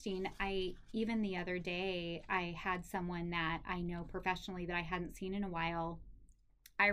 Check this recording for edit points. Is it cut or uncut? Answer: uncut